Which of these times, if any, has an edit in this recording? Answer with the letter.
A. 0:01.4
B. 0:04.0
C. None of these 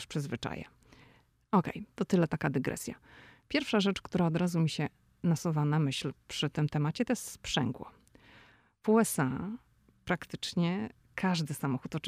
A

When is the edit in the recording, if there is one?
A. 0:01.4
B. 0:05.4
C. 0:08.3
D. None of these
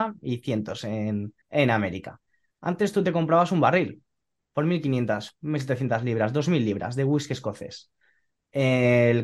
A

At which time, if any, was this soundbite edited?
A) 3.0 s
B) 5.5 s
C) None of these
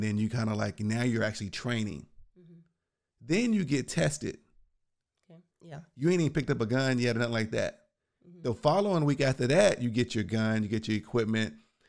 B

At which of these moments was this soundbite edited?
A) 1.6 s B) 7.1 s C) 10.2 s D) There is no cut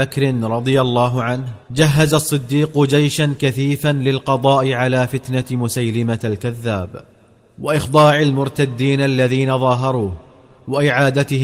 A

